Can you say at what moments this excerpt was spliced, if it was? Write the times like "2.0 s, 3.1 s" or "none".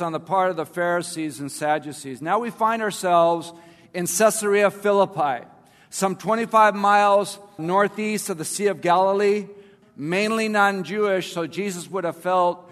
7.6 s, 9.8 s